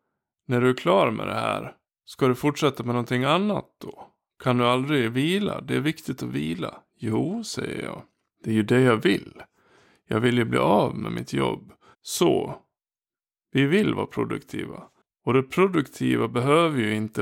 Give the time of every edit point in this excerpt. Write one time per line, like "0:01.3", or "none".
0:11.9